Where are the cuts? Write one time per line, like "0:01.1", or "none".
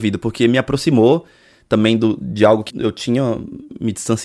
0:02.7